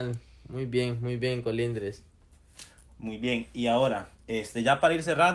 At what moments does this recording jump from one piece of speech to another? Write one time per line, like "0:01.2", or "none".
none

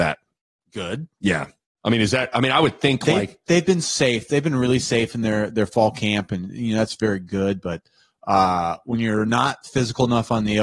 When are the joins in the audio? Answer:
none

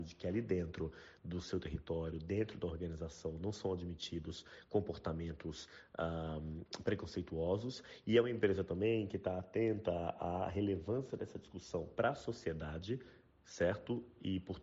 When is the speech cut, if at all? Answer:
none

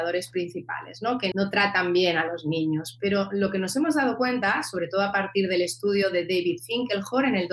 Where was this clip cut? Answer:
0:01.3

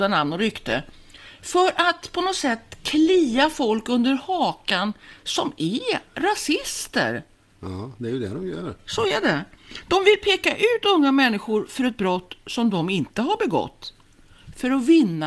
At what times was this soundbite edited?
none

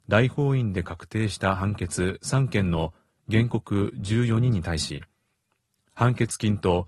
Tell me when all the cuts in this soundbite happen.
none

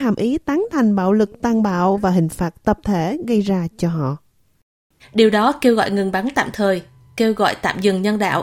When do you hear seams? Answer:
0:05.0

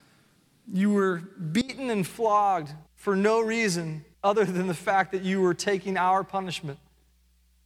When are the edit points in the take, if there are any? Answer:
0:02.9
0:04.1

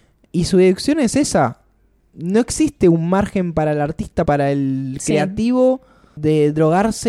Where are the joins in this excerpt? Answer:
0:04.3

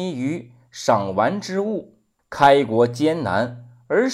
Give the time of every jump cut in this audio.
0:02.2

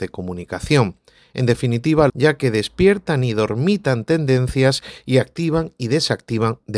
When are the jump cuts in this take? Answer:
0:02.1

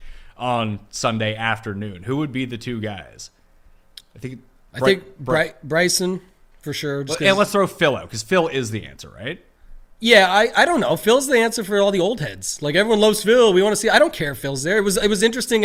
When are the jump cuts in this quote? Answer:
none

